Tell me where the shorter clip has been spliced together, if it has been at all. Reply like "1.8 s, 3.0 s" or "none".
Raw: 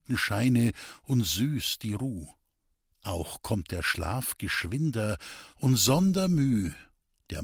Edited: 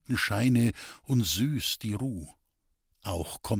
none

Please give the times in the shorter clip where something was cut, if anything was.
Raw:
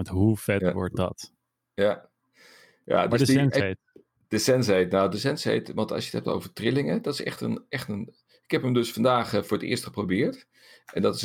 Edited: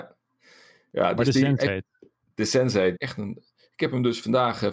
3.0 s

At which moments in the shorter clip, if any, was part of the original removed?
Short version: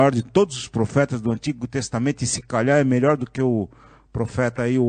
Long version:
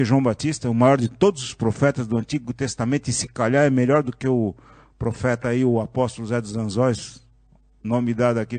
none

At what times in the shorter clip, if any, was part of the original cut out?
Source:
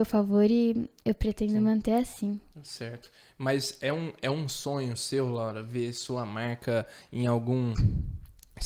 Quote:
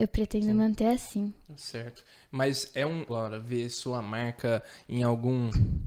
3.1 s

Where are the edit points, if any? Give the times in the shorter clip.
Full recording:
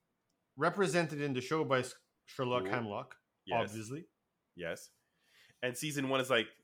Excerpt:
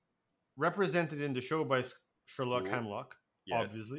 none

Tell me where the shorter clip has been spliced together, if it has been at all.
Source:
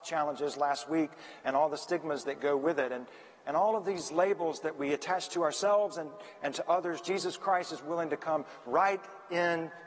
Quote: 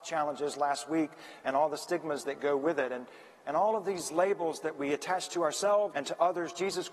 5.9 s

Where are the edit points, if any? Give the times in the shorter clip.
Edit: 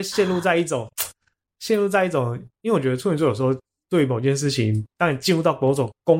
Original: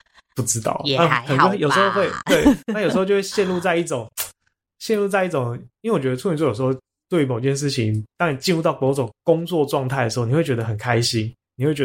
none

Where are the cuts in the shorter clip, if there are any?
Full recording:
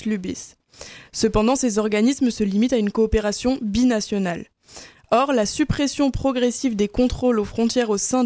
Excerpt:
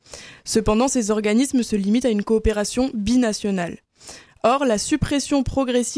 none

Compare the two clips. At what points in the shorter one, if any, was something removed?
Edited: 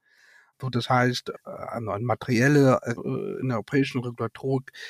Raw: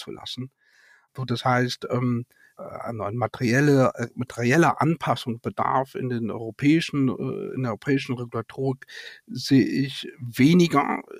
1.3 s, 3.0 s

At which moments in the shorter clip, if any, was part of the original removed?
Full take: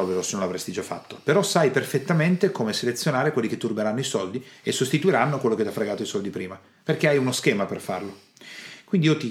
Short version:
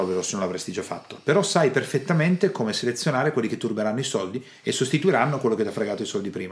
none

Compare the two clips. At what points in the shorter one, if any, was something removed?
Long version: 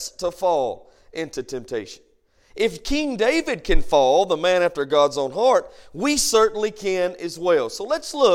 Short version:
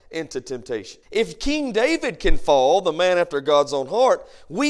1.0 s

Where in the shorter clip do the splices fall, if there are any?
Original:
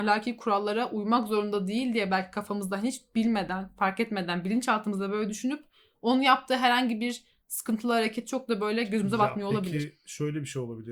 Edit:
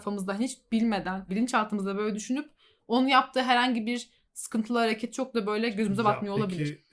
1.3 s

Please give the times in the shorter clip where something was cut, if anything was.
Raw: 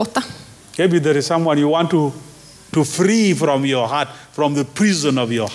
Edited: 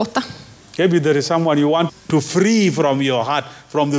1.9 s

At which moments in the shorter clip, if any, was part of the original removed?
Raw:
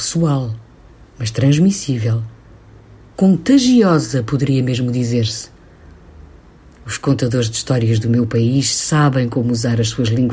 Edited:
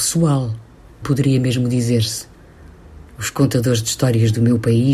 1.0 s, 3.1 s

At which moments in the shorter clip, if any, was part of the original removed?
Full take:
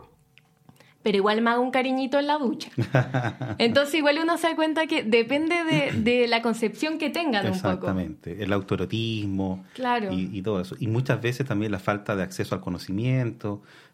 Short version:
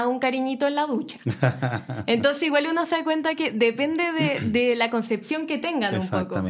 none

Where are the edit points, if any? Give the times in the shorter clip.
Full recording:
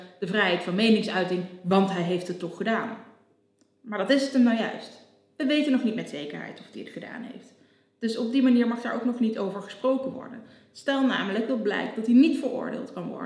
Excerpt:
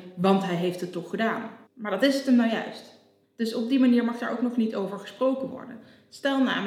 1.7 s, 3.2 s

